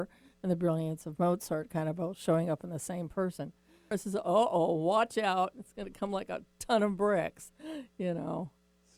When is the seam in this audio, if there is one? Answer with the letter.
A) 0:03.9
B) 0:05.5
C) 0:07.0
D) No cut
A